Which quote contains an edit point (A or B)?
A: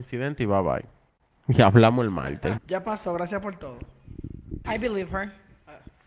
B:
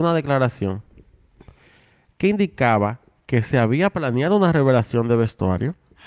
A